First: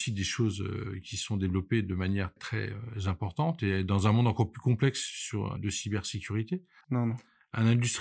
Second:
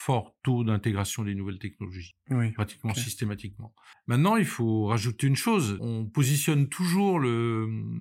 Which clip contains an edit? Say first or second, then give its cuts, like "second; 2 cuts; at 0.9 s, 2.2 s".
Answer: first; 3 cuts; at 2.4 s, 5.6 s, 6.8 s